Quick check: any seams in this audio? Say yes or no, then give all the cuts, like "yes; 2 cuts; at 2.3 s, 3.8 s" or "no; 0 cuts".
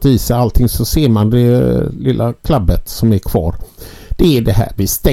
no; 0 cuts